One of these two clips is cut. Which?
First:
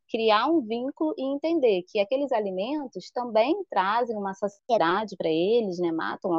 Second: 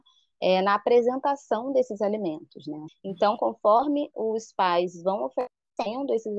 second; 1 cut; at 2.9 s

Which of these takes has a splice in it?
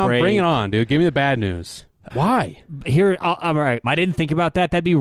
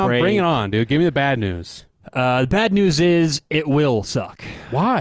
first; 2 cuts; at 2.1 s, 3.8 s

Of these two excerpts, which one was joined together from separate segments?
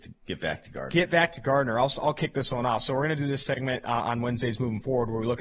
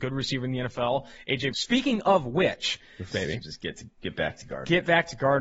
second; 2 cuts; at 1.5 s, 3.1 s

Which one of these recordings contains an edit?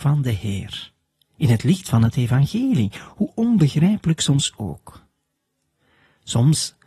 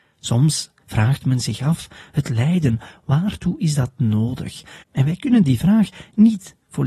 second; 1 cut; at 4.8 s

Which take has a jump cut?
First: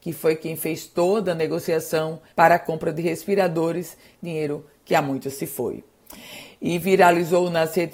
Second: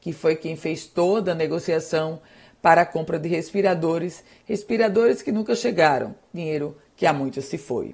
first; 2 cuts; at 2.3 s, 4.2 s

